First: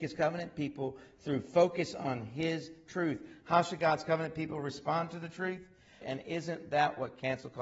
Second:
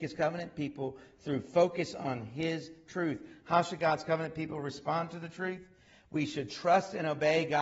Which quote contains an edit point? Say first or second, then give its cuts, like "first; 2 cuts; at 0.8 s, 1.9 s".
first; 1 cut; at 6.0 s